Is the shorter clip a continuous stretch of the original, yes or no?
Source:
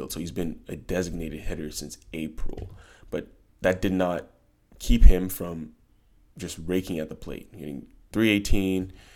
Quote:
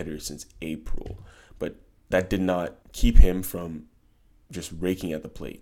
no